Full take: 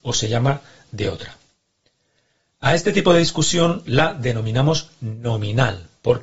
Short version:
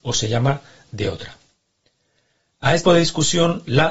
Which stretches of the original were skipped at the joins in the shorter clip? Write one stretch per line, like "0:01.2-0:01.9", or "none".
0:02.9-0:03.1